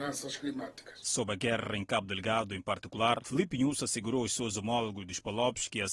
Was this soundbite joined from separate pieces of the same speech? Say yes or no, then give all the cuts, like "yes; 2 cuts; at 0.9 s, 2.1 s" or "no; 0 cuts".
no; 0 cuts